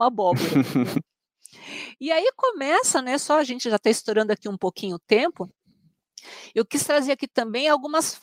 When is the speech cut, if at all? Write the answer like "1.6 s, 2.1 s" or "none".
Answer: 1.1 s